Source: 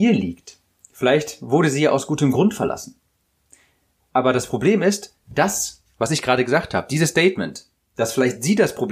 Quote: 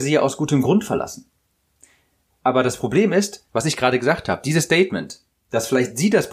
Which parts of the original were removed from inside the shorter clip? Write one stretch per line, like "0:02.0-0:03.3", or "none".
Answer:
0:05.2-0:05.9